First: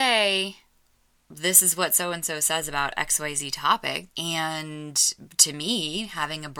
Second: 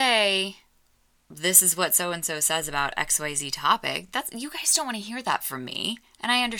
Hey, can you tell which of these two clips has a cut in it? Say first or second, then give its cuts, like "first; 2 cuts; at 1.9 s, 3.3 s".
first; 1 cut; at 4.1 s